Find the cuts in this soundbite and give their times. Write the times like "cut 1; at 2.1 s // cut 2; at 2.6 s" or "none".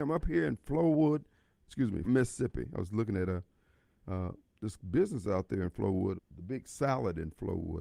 cut 1; at 2.0 s // cut 2; at 6.2 s